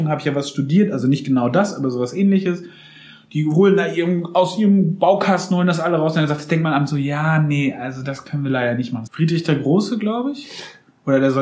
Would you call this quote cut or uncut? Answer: cut